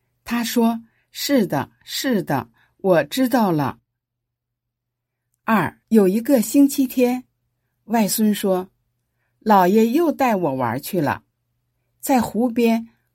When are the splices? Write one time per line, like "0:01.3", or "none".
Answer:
0:05.8